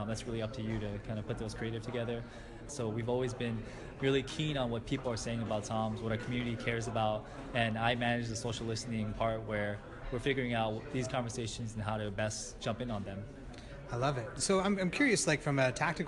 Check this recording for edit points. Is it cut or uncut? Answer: cut